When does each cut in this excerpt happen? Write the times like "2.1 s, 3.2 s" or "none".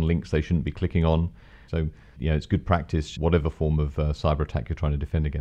1.7 s, 3.2 s